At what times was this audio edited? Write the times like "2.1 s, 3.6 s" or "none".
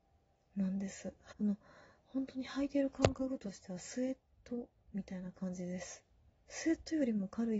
1.3 s